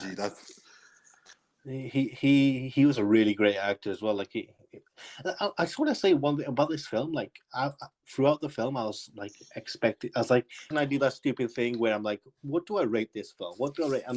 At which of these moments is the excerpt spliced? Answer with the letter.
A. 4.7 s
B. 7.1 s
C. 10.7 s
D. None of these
C